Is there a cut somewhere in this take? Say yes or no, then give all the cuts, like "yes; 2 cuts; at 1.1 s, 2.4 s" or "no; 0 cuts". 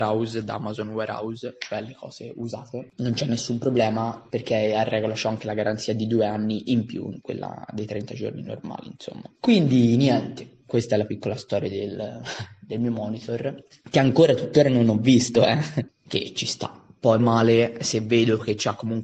yes; 2 cuts; at 15.9 s, 17.2 s